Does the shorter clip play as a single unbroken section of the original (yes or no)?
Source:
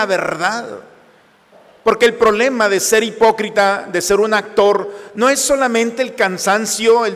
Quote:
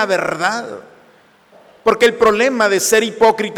yes